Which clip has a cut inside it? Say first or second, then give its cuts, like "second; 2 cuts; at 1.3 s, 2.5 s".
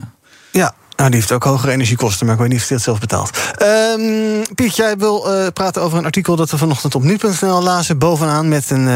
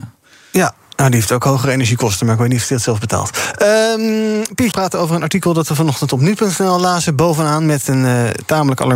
second; 1 cut; at 4.7 s